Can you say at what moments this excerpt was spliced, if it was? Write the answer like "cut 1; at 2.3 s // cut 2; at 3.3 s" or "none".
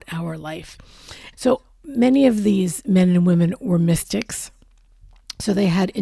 cut 1; at 1.3 s